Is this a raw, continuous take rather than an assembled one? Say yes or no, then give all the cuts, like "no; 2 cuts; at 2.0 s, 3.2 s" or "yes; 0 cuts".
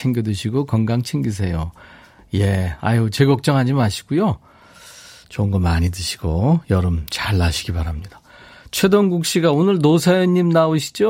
yes; 0 cuts